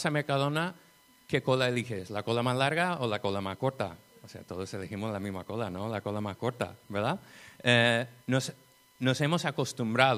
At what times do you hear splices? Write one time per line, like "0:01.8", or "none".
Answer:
0:08.2

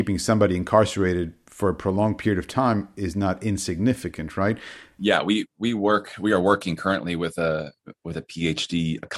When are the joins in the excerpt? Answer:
0:05.0

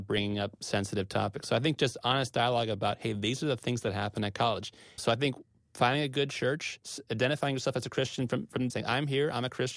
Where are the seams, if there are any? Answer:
0:05.0
0:08.7

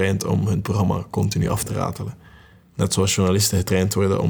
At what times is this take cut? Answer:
none

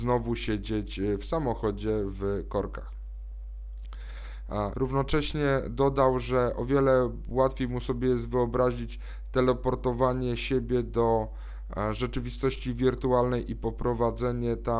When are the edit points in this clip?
0:04.7

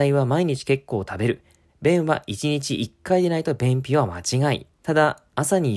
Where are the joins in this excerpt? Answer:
0:01.7
0:04.7

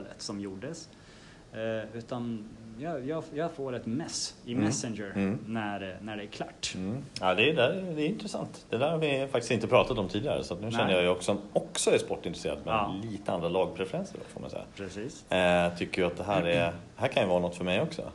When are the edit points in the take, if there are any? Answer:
none

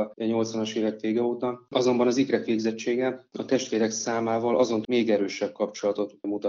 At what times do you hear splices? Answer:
0:01.7
0:04.8

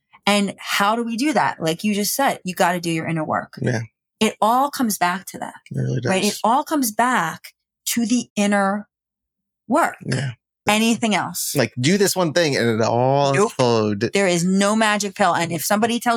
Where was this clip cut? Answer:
0:10.7

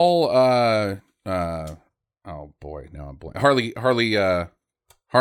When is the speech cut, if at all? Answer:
none

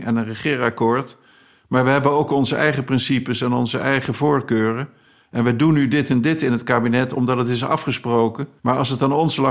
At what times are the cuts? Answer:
0:08.6

